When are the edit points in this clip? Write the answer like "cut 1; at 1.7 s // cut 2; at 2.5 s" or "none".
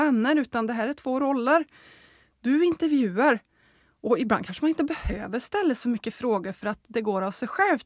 none